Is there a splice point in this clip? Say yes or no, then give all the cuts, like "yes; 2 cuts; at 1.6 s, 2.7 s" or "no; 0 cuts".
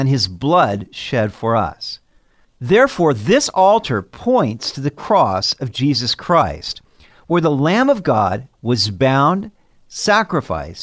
yes; 2 cuts; at 2.4 s, 8.5 s